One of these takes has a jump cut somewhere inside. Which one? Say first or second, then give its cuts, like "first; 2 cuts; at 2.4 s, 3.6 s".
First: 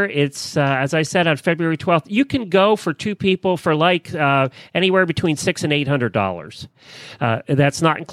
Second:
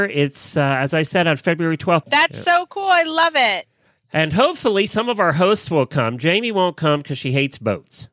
second; 1 cut; at 2.0 s